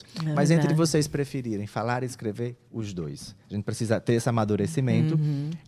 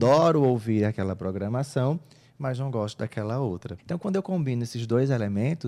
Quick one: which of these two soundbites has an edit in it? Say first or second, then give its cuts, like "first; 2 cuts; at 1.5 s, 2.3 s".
second; 1 cut; at 3.8 s